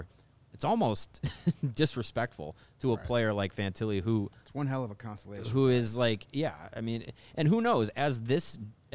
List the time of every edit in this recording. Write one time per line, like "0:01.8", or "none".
none